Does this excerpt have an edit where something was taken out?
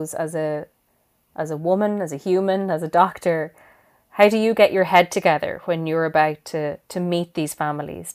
no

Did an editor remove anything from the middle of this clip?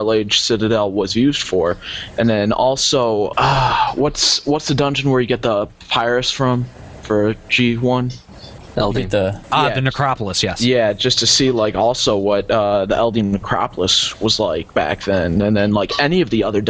yes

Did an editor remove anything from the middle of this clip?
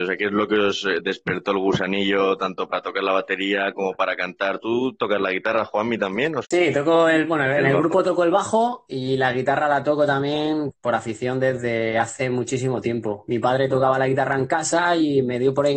yes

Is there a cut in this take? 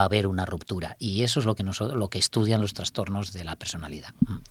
no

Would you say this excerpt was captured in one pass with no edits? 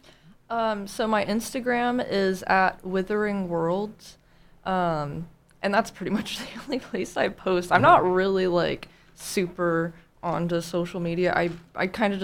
yes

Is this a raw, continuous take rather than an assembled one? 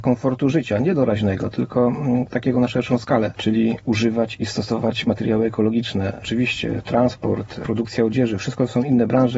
yes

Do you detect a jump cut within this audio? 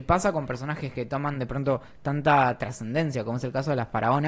no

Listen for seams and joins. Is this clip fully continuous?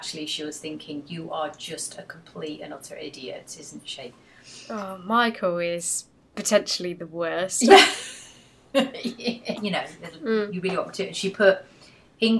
no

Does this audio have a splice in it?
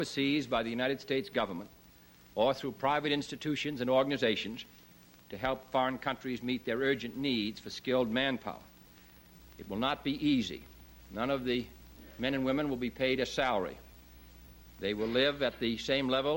yes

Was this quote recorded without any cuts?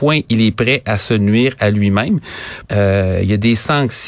no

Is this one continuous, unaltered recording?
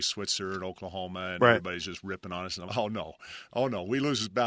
no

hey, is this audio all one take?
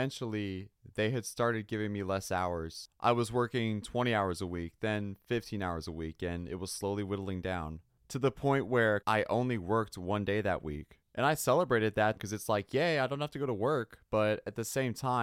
no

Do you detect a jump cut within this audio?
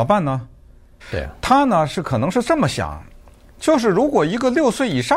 yes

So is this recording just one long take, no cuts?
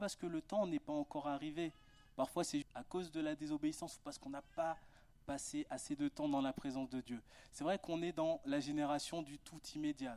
no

